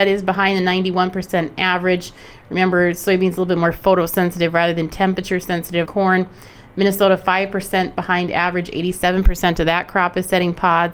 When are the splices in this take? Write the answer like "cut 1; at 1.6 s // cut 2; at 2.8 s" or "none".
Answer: cut 1; at 5.9 s